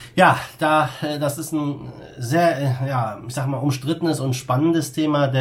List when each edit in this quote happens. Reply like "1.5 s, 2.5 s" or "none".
none